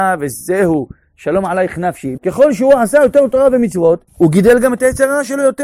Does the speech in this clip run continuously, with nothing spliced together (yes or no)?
no